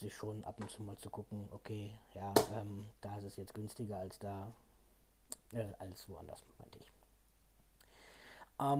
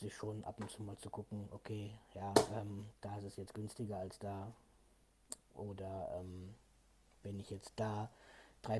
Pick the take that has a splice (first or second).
first